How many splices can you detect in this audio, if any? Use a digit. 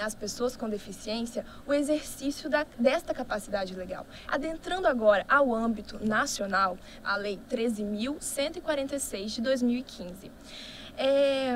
2